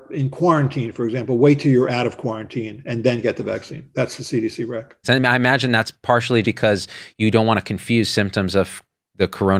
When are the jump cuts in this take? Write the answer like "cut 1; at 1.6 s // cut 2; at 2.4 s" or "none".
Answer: cut 1; at 5.0 s // cut 2; at 6.4 s